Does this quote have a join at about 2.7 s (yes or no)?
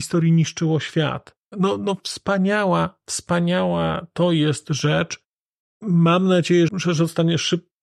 no